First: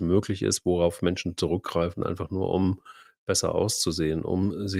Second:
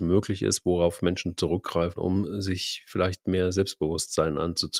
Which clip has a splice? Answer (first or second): second